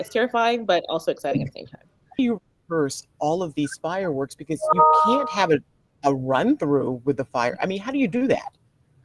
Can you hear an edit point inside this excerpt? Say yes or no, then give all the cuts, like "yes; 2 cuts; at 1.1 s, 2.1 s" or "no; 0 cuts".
no; 0 cuts